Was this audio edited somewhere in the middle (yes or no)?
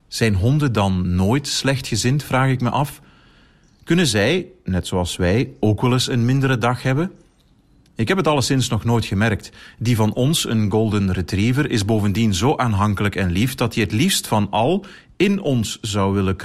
no